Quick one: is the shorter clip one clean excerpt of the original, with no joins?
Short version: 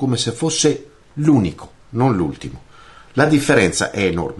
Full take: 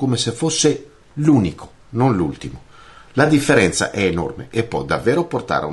yes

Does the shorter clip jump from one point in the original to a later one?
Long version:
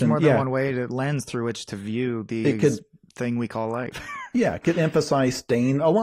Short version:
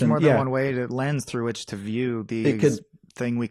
no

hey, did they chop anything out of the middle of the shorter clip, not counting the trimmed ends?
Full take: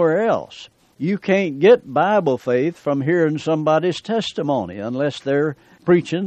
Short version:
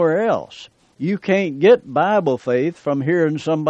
no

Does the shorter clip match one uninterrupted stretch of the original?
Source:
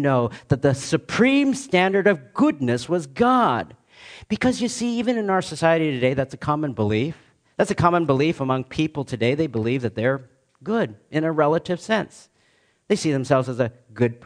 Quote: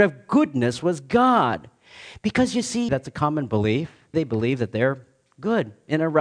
no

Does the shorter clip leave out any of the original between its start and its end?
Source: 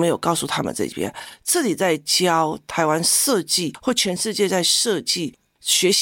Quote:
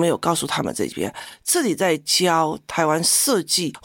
no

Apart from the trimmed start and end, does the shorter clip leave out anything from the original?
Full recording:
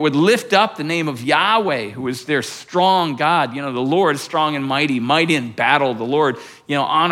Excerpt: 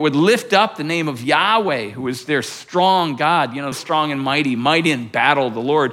yes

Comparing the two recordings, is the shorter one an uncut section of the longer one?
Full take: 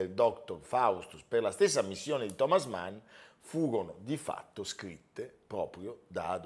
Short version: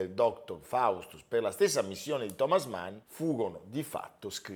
no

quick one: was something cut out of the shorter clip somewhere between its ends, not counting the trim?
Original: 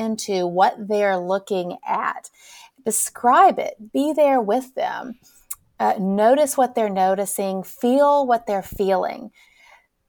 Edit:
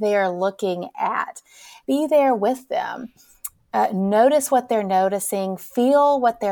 yes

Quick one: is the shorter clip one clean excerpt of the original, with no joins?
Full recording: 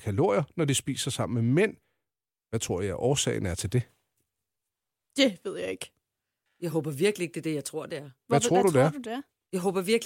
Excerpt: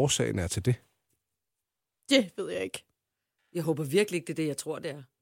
yes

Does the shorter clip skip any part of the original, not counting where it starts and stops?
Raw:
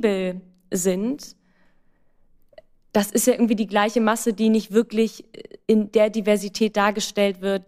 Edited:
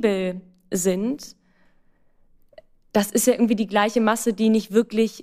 no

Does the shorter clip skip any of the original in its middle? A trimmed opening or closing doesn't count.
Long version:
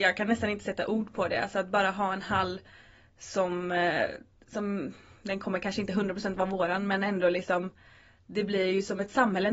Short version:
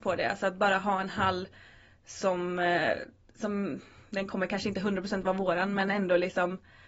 no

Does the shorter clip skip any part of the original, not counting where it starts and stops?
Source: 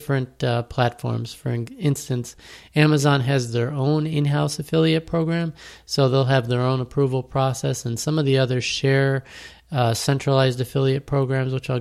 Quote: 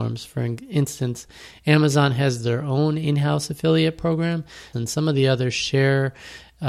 yes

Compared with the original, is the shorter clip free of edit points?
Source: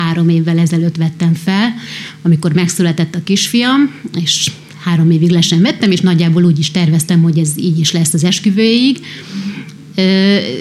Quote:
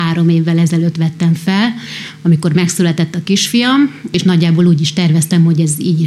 no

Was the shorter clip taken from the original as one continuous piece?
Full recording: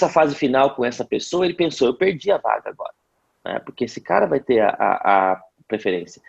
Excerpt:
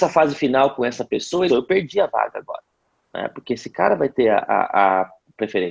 no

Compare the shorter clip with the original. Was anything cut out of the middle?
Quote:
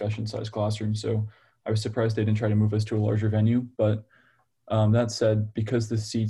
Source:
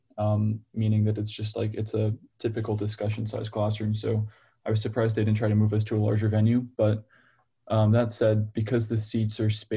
no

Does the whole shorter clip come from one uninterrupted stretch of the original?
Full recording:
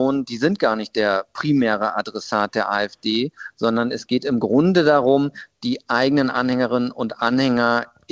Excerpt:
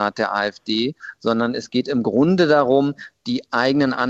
yes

